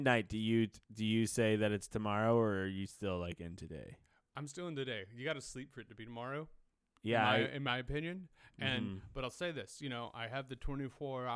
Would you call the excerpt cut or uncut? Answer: uncut